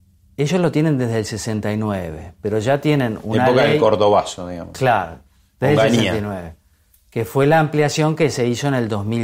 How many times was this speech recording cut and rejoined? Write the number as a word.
zero